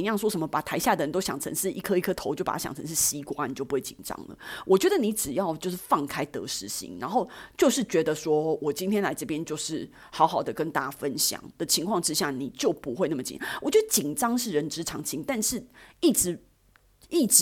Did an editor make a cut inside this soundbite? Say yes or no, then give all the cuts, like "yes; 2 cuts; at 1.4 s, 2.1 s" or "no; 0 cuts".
no; 0 cuts